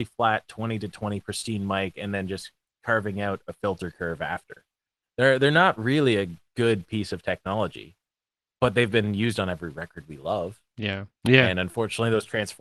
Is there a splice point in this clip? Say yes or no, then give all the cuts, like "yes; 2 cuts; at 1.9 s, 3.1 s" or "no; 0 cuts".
yes; 2 cuts; at 5.0 s, 11.2 s